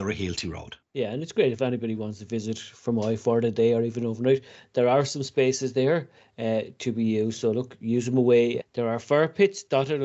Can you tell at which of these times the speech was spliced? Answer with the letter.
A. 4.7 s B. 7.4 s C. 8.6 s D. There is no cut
C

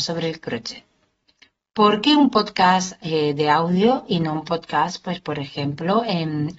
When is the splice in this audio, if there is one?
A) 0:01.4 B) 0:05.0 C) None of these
C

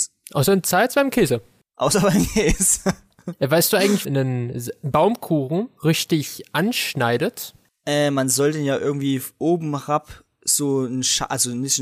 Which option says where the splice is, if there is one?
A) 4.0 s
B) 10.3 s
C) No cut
A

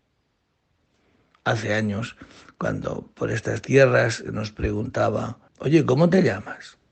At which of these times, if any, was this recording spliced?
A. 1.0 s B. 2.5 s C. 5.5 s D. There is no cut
C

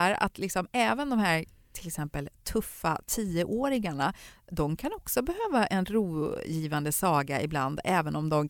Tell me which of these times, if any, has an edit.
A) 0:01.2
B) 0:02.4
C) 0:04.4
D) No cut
D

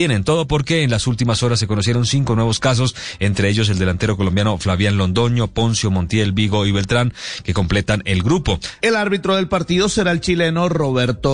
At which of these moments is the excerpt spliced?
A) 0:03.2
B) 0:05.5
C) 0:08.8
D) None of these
C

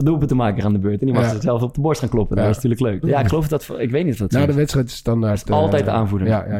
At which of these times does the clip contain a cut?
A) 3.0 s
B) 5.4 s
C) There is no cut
A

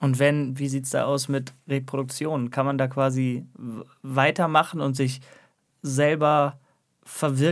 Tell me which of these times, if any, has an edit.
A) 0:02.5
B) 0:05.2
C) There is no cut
C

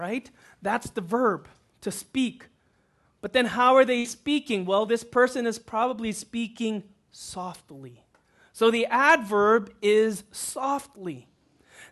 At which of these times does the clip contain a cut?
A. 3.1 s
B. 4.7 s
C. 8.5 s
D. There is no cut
D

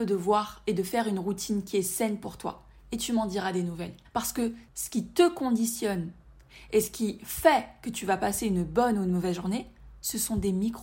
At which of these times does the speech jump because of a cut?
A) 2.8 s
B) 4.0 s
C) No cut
B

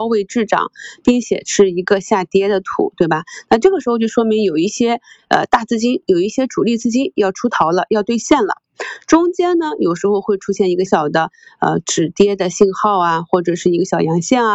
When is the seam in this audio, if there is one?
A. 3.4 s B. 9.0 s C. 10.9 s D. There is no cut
C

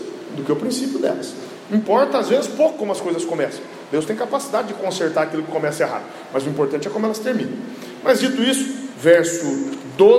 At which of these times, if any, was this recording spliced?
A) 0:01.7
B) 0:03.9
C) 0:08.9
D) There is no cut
C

